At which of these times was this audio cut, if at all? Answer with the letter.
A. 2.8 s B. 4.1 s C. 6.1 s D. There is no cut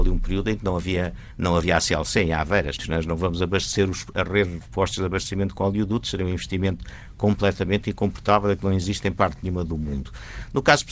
A